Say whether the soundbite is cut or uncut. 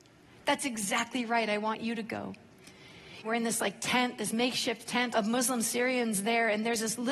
cut